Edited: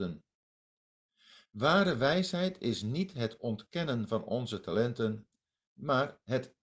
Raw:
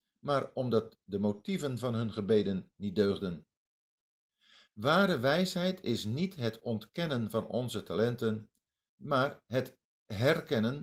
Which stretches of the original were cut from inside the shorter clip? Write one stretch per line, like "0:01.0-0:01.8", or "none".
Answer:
none